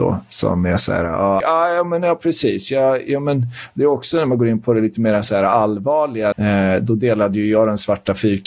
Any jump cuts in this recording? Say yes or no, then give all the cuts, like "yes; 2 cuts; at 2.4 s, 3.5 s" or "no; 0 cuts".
yes; 2 cuts; at 1.4 s, 6.3 s